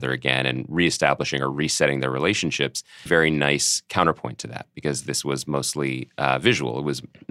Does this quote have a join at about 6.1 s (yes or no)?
no